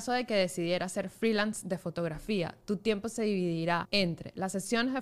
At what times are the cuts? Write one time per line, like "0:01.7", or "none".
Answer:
none